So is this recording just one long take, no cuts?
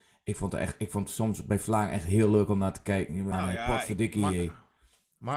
no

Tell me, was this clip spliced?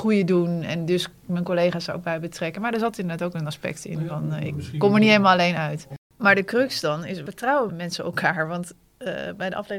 yes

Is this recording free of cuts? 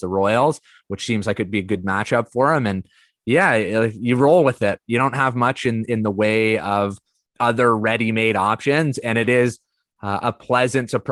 yes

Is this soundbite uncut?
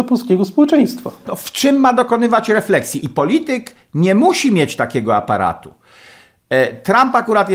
no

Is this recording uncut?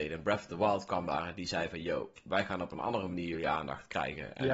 yes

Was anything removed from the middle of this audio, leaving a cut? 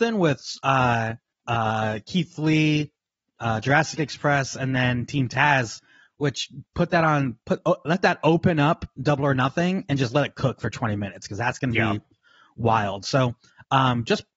yes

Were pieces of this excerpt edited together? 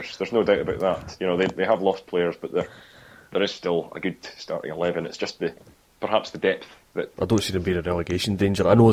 yes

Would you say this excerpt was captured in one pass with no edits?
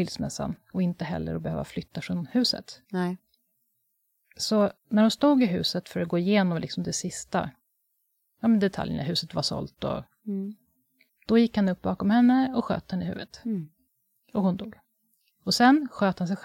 yes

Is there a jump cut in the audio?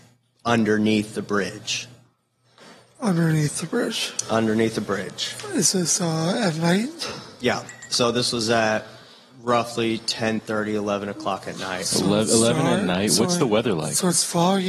no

